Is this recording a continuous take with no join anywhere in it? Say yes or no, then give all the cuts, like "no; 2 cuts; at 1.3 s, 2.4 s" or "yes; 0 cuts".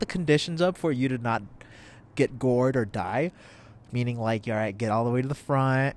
yes; 0 cuts